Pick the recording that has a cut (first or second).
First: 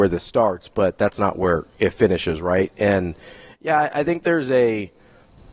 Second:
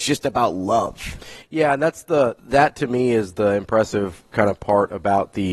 second